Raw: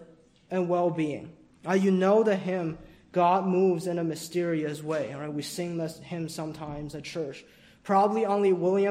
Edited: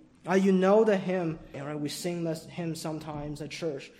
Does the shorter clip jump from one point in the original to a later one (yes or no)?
yes